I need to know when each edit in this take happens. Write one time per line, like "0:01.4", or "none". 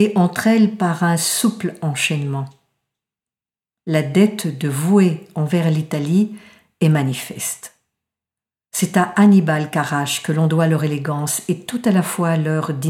none